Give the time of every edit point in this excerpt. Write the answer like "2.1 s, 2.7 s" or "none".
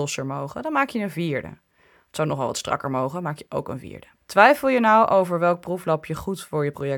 4.1 s